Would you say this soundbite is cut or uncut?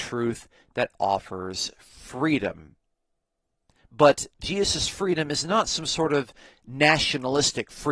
cut